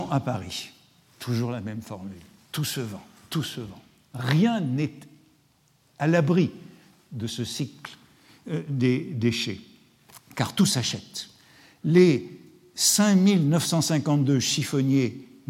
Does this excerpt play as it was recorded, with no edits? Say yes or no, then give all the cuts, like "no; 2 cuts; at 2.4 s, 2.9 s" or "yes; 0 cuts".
yes; 0 cuts